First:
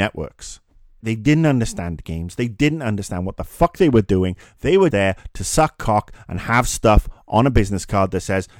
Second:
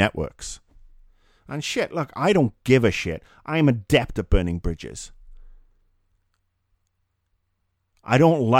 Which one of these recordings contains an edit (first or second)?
first